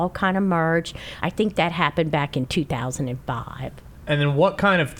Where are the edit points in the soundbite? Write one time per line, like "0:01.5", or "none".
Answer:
none